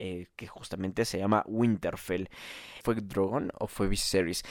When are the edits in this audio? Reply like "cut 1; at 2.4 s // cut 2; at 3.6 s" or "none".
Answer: cut 1; at 2.8 s